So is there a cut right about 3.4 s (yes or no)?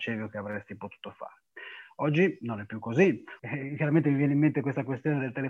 yes